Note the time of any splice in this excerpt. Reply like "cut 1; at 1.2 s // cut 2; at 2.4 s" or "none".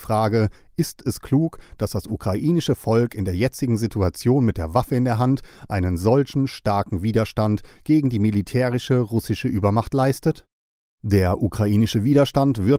cut 1; at 10.8 s

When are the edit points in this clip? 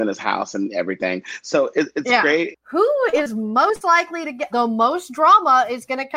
cut 1; at 2.5 s // cut 2; at 4.5 s

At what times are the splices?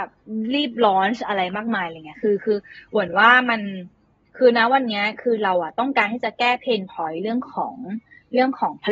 none

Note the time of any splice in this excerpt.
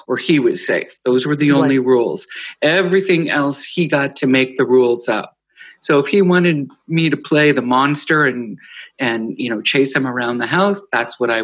none

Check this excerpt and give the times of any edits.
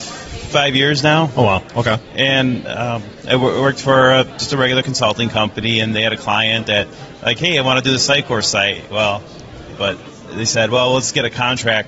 cut 1; at 9.8 s

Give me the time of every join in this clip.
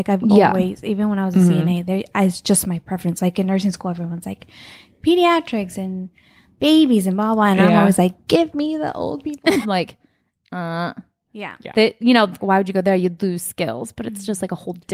cut 1; at 9.6 s // cut 2; at 12.4 s

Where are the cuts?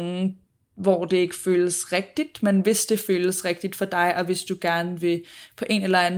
none

